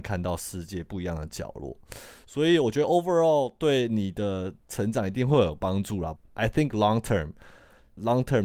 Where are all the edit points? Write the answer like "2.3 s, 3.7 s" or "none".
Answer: 6.2 s